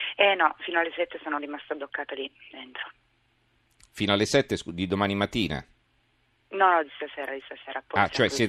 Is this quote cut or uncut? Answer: uncut